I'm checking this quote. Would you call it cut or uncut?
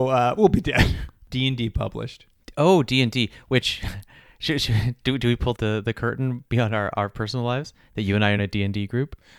cut